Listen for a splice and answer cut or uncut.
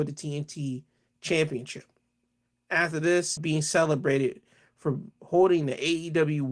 cut